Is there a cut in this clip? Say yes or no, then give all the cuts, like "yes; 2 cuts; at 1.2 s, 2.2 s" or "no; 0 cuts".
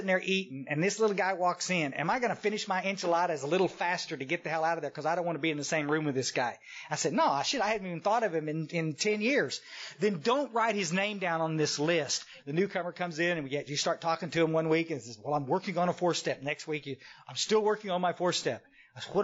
yes; 1 cut; at 12.4 s